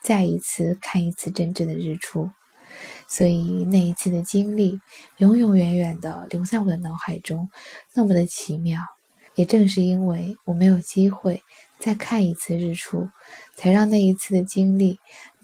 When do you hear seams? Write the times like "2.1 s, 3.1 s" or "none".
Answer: 9.2 s